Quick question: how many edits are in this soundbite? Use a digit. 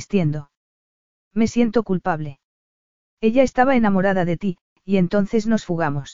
1